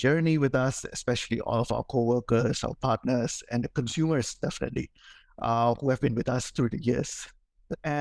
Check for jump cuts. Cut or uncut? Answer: uncut